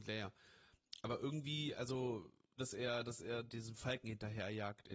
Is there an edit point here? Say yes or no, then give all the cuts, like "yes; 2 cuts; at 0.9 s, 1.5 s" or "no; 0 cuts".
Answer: yes; 1 cut; at 2.6 s